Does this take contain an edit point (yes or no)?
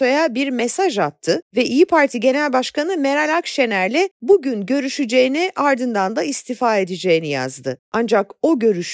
no